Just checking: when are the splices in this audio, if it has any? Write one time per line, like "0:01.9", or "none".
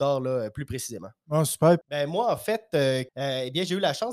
0:01.8
0:03.1